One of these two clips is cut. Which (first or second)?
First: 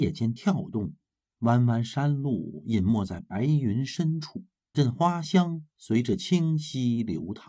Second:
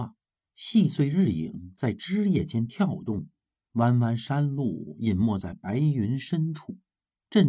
first